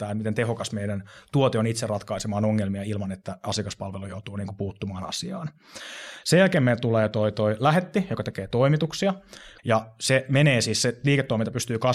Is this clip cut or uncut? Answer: cut